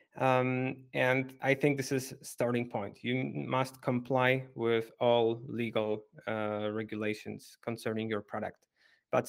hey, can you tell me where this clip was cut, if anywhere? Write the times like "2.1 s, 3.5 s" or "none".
none